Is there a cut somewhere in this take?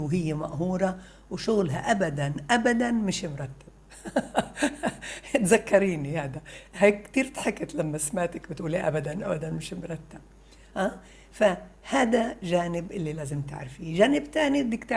no; 0 cuts

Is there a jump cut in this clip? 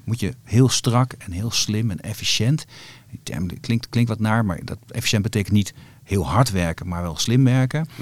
no; 0 cuts

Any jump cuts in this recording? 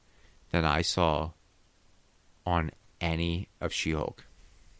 no; 0 cuts

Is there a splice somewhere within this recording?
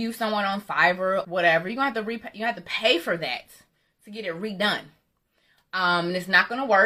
yes; 1 cut; at 1.2 s

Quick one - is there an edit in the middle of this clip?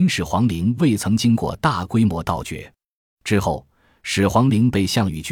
yes; 1 cut; at 3.0 s

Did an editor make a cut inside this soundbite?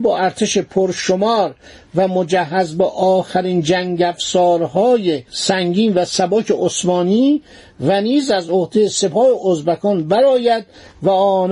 yes; 1 cut; at 5.3 s

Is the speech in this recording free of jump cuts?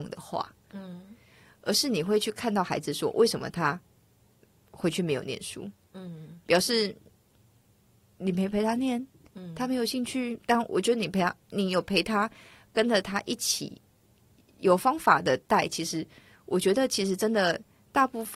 yes; 0 cuts

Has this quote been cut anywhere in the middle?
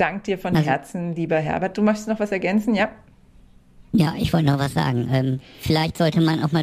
no; 0 cuts

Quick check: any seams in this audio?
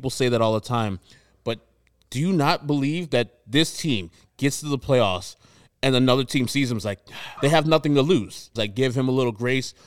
yes; 2 cuts; at 7.4 s, 8.6 s

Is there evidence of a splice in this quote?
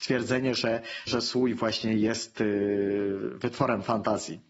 yes; 1 cut; at 1.1 s

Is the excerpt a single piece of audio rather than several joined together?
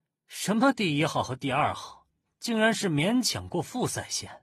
yes; 0 cuts

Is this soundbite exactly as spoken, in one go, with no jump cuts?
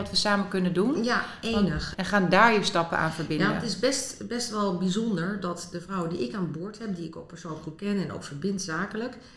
no; 1 cut; at 1.9 s

